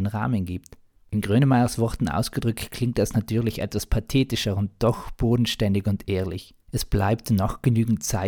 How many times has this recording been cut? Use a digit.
2